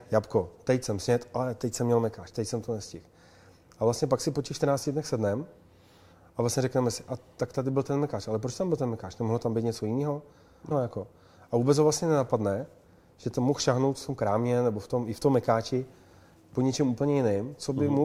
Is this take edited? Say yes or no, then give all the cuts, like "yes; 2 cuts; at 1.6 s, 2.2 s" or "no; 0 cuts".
yes; 1 cut; at 10.7 s